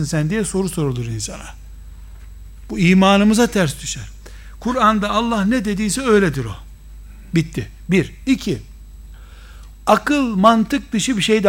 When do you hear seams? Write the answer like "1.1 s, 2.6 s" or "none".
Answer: 9.7 s